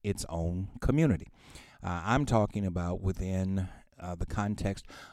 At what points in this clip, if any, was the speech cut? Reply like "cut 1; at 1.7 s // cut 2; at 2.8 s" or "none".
cut 1; at 1.7 s